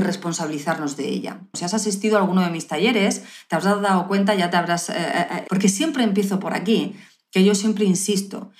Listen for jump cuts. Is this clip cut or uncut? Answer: cut